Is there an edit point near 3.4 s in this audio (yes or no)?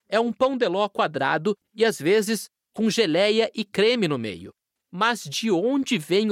no